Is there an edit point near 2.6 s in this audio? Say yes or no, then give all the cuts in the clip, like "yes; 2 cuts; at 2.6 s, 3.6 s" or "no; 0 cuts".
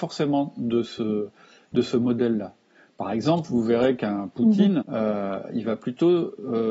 no; 1 cut; at 4.8 s